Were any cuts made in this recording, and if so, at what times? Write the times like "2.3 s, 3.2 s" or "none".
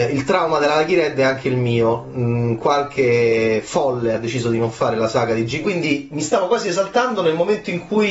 5.6 s